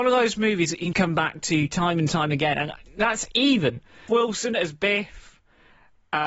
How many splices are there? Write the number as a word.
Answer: two